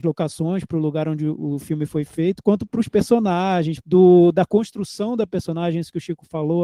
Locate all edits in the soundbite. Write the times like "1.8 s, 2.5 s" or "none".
3.8 s